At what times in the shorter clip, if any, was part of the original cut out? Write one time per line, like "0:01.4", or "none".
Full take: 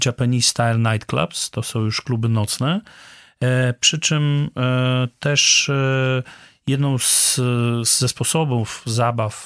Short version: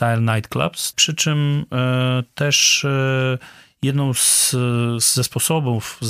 0:00.9